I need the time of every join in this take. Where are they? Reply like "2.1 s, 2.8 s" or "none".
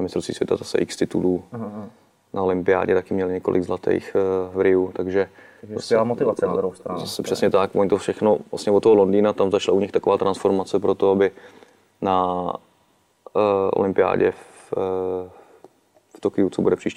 none